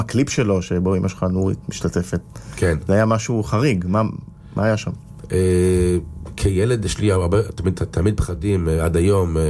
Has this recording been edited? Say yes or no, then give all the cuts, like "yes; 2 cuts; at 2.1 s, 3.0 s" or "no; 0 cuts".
no; 0 cuts